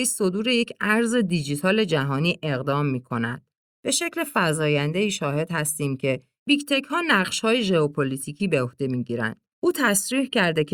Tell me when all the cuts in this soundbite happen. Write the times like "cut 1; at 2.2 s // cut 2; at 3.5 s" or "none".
cut 1; at 3.7 s // cut 2; at 9.5 s